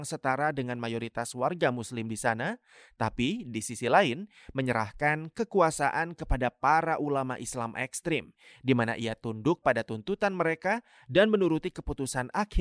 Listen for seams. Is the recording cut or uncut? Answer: uncut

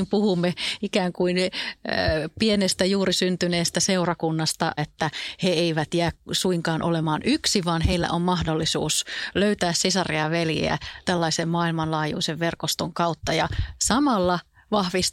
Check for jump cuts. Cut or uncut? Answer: cut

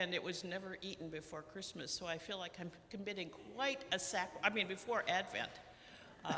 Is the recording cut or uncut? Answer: uncut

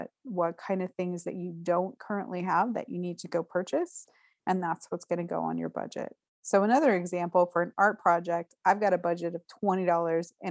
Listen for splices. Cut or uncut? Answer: uncut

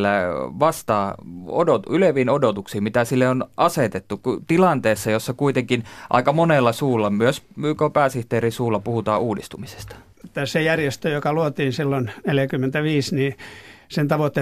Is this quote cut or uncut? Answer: cut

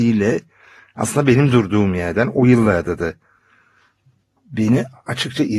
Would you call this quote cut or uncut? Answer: uncut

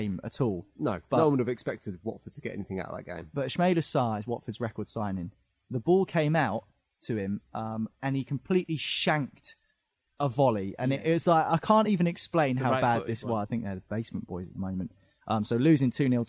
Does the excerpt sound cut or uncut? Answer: cut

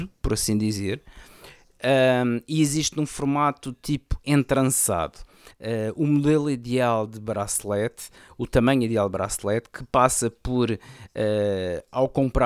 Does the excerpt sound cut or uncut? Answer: cut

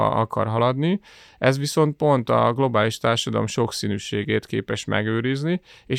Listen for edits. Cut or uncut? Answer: uncut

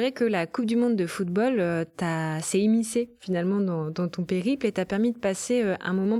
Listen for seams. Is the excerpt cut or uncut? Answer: uncut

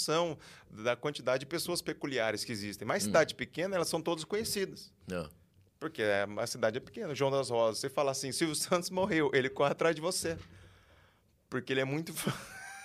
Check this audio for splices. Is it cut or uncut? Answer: uncut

